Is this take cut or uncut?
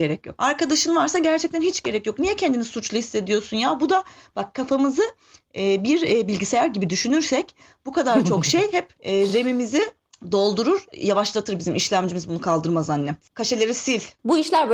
uncut